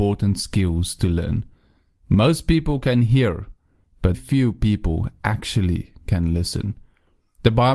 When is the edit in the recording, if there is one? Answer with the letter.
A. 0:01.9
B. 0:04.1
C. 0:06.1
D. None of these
B